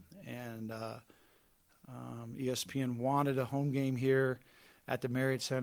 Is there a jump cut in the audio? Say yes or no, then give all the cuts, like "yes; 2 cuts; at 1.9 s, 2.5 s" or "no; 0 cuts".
no; 0 cuts